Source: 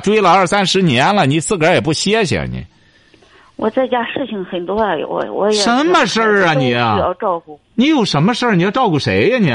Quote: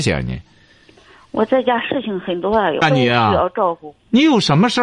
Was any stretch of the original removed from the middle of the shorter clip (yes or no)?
yes